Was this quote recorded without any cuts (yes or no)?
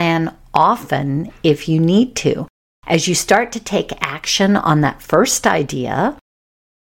yes